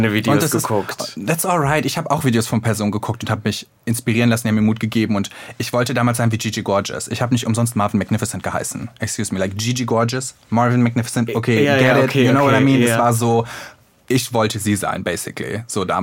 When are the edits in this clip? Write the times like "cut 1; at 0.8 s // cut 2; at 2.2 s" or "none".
none